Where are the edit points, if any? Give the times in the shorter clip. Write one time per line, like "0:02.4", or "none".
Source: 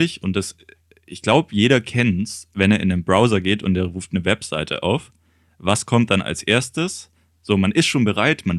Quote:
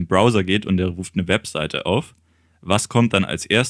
none